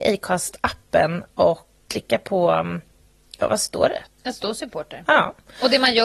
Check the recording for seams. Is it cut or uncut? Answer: cut